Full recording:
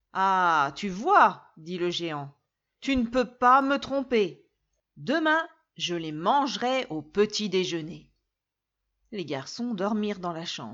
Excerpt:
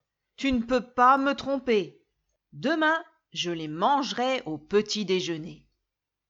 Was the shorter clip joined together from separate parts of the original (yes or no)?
no